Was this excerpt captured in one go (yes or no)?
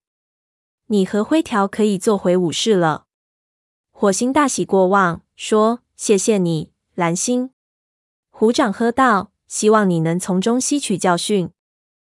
yes